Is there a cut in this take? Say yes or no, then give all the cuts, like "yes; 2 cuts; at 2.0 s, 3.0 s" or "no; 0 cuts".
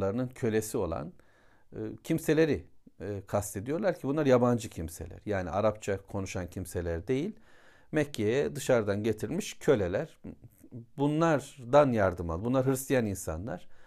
no; 0 cuts